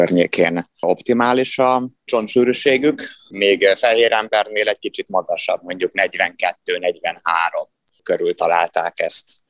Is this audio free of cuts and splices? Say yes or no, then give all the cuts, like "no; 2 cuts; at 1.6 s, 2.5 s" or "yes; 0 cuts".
yes; 0 cuts